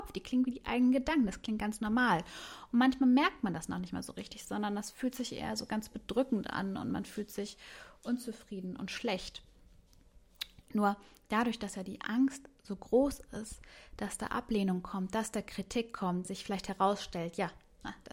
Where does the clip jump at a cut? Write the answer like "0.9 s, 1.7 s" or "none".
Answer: 10.6 s, 16.3 s